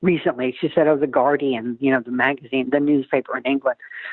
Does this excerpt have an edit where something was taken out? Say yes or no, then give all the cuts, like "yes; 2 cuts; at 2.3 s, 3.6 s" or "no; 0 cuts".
no; 0 cuts